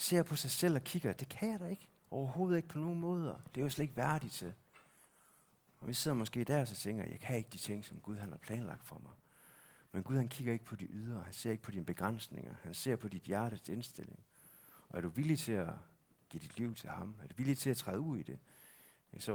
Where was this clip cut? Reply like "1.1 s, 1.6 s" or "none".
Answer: 2.0 s